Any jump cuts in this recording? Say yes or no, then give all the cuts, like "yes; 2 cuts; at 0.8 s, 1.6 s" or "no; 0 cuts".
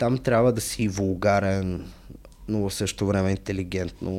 no; 0 cuts